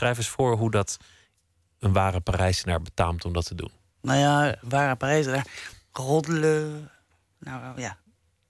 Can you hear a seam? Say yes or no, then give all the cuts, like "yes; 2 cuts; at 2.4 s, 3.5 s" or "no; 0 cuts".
yes; 1 cut; at 5.7 s